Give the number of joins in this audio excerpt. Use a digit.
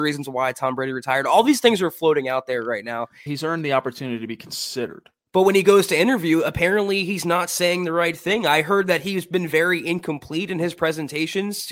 1